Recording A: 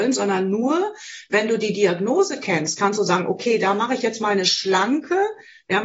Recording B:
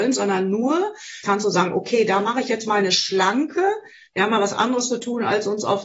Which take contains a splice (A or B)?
B